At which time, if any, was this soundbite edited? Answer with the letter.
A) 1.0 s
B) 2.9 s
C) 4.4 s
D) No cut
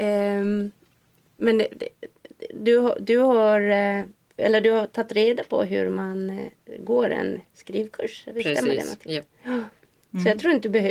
C